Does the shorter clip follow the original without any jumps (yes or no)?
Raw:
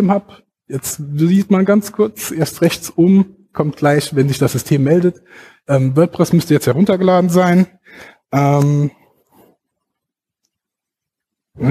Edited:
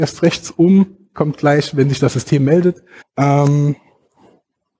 no